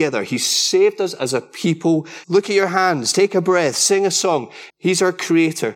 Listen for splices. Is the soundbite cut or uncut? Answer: cut